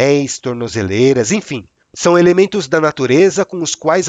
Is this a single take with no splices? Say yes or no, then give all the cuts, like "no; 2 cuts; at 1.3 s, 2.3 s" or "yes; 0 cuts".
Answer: yes; 0 cuts